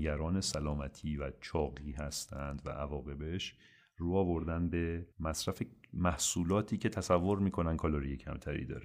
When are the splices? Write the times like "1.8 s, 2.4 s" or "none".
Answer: 5.1 s